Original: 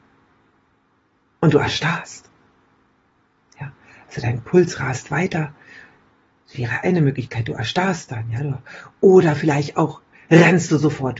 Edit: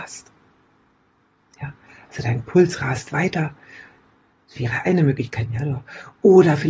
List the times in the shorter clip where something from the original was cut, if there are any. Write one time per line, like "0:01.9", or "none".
0:05.5